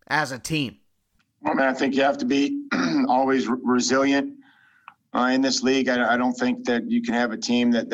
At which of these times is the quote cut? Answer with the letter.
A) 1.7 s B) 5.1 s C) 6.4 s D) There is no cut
D